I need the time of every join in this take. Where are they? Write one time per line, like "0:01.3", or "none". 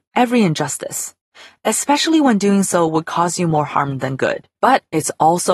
0:04.5